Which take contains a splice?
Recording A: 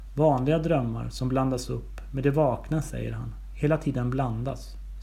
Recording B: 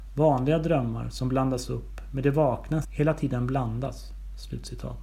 B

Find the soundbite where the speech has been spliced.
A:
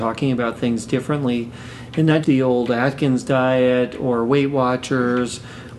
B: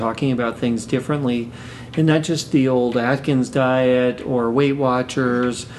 A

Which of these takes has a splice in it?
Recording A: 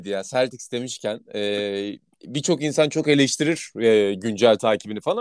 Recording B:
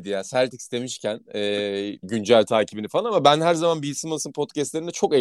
B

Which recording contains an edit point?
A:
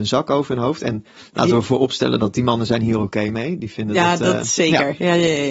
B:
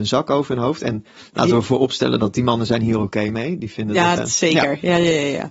B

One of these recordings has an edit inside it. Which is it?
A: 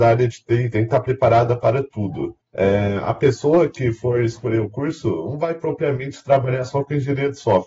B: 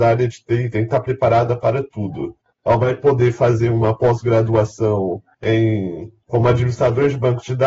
B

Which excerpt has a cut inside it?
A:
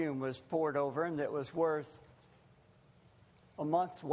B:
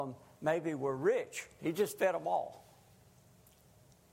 B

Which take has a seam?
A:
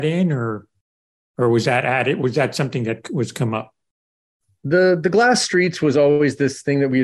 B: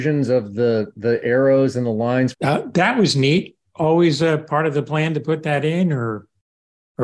B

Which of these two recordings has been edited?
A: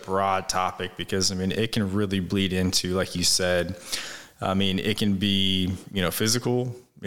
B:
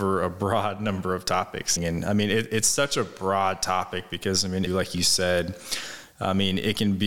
B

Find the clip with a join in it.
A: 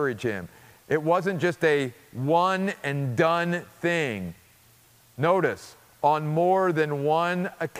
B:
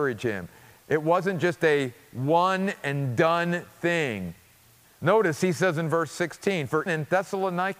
B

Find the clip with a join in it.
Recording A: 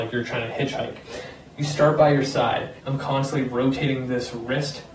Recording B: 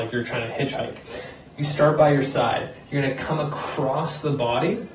A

